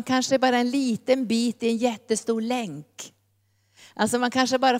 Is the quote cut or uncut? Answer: uncut